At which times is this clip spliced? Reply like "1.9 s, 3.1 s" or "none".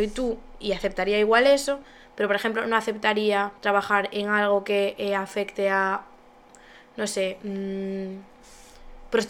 3.6 s